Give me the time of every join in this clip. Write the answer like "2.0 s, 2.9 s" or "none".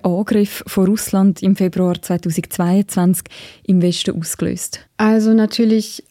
4.9 s